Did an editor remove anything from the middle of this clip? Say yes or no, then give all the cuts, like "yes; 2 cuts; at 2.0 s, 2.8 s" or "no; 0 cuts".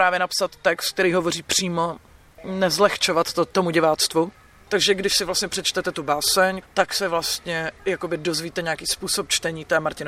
yes; 2 cuts; at 4.7 s, 6.6 s